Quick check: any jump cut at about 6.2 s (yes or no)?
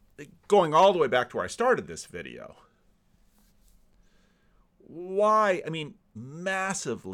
yes